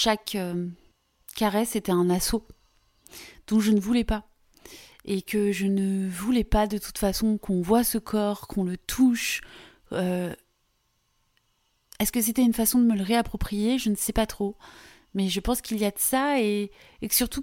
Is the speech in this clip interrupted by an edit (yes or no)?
no